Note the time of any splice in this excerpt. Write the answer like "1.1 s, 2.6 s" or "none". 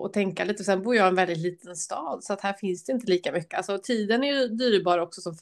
3.5 s